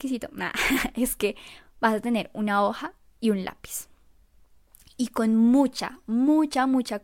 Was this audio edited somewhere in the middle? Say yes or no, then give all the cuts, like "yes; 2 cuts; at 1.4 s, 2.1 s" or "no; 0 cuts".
no; 0 cuts